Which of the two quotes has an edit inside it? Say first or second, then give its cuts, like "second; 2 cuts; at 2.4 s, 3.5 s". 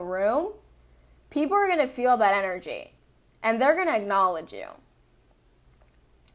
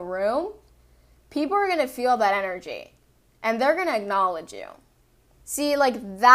second; 1 cut; at 5.3 s